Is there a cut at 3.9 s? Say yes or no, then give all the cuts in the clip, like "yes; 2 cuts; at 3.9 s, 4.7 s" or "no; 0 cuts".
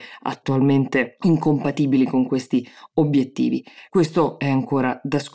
yes; 1 cut; at 3.9 s